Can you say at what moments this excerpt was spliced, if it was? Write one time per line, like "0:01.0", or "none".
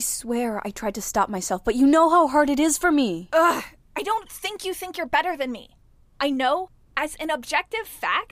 none